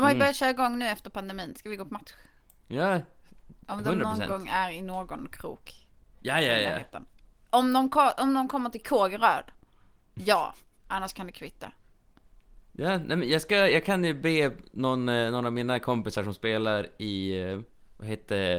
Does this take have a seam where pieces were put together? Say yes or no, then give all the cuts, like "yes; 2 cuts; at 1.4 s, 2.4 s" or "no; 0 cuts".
no; 0 cuts